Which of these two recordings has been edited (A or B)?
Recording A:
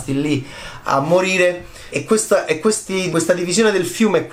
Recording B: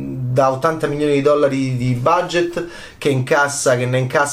A